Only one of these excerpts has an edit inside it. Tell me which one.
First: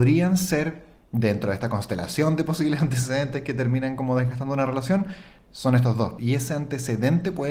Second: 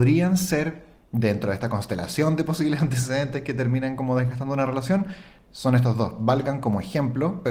first; 1 cut; at 6.2 s

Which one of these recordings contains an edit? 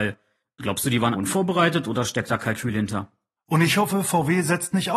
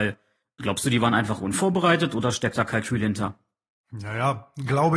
first; 2 cuts; at 1.1 s, 3.4 s

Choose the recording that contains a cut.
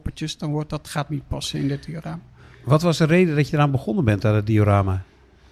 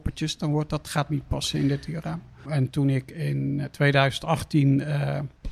second; 1 cut; at 2.5 s

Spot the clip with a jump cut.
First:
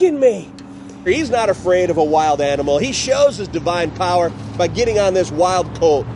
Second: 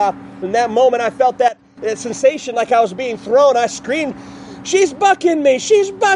first; 1 cut; at 1.1 s

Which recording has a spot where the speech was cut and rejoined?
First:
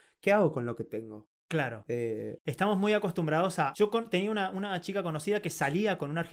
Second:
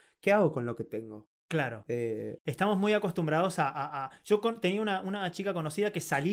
first; 1 cut; at 3.7 s

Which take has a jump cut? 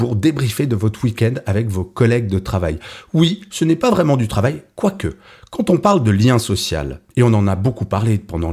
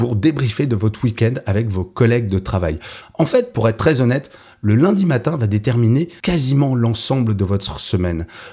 second; 1 cut; at 3.0 s

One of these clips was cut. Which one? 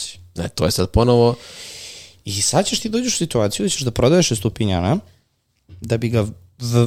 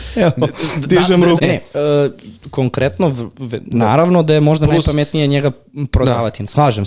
second; 1 cut; at 1.4 s

